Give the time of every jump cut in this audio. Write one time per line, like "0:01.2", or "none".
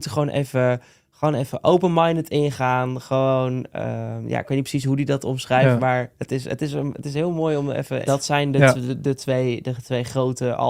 0:08.1